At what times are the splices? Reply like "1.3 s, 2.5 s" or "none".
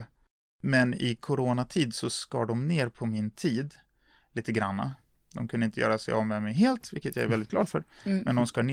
none